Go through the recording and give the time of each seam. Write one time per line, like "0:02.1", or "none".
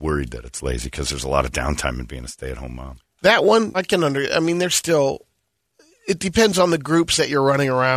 0:03.7

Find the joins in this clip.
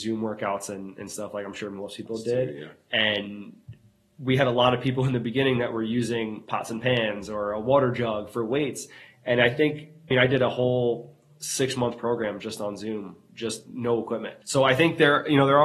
0:10.1
0:14.4

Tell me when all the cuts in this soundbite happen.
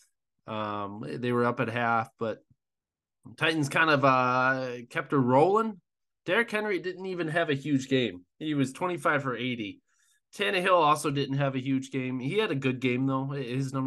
none

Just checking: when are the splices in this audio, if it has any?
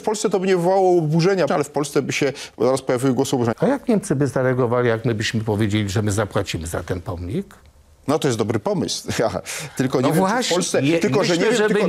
0:01.5
0:03.5

